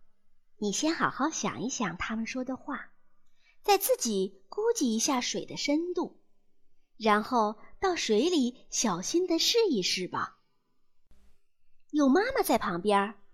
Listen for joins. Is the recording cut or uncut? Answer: uncut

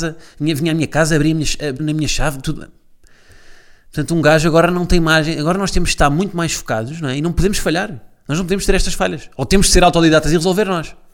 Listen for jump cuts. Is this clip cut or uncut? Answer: cut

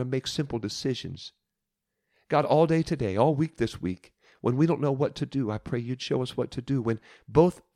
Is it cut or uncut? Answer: uncut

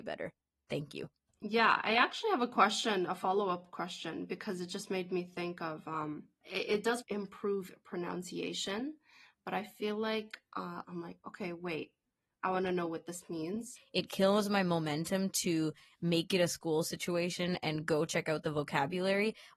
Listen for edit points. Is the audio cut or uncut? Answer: cut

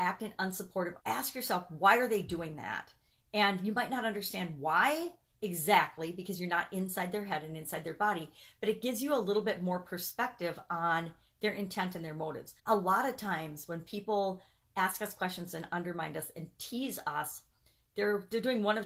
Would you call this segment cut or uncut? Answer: cut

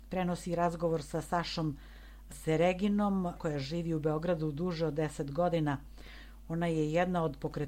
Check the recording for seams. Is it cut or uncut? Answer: cut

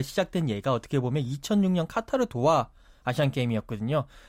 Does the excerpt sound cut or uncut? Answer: uncut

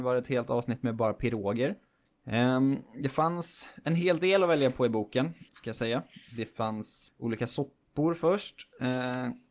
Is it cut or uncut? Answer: cut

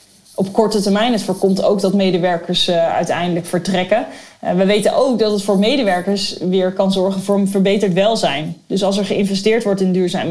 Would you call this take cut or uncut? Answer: uncut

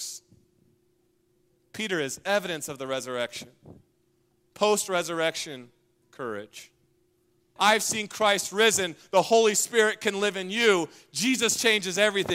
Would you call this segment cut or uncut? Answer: cut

